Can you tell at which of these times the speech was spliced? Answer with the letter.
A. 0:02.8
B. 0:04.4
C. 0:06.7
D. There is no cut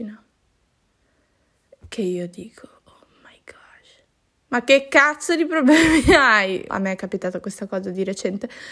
C